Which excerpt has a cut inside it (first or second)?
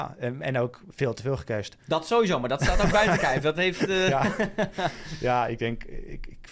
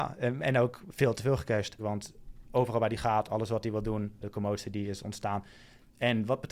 second